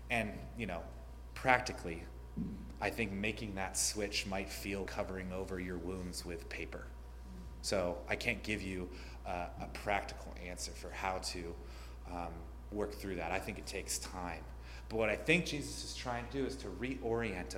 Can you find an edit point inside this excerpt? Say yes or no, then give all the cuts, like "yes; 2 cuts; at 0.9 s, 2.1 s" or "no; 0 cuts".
yes; 2 cuts; at 4.9 s, 9.6 s